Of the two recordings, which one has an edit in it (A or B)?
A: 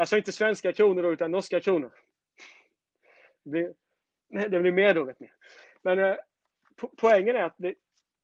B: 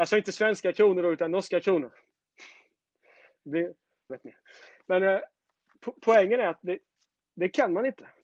B